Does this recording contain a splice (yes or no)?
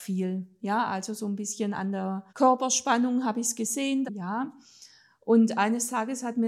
yes